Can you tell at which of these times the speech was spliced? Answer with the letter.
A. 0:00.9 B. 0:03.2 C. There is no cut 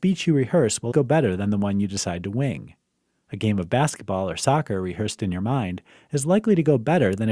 A